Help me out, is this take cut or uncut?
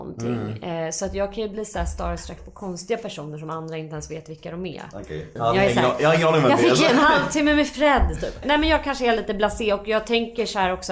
cut